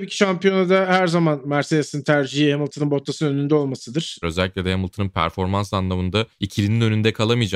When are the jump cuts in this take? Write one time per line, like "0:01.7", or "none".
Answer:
0:04.2